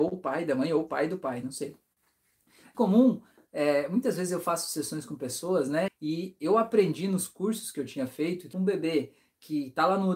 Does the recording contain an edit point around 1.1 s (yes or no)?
no